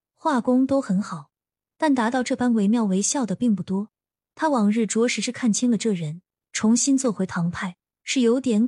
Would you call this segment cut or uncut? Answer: cut